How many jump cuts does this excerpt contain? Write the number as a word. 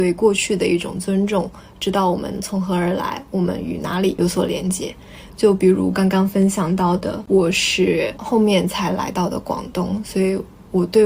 zero